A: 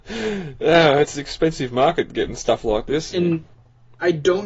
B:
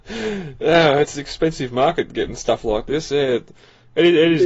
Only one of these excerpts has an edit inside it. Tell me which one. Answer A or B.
A